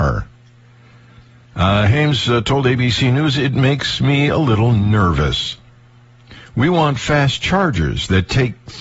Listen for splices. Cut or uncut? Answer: uncut